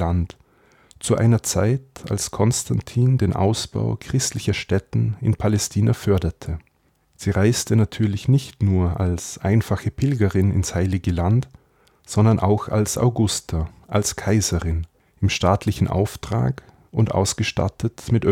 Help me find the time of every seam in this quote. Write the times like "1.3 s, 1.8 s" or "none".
7.0 s